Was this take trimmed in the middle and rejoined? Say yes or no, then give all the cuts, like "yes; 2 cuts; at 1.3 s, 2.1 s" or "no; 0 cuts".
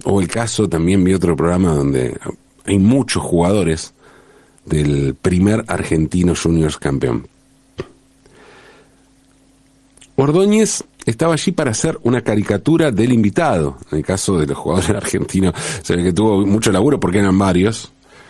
no; 0 cuts